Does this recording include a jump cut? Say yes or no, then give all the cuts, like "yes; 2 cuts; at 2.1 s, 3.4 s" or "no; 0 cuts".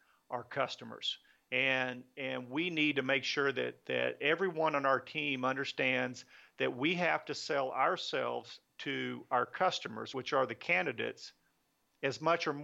no; 0 cuts